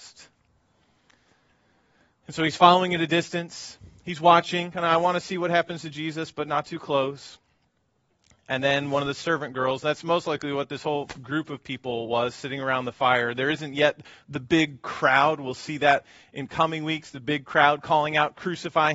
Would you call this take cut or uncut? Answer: uncut